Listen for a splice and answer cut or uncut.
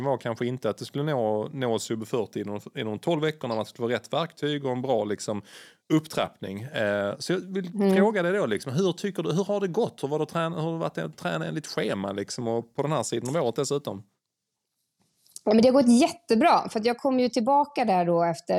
uncut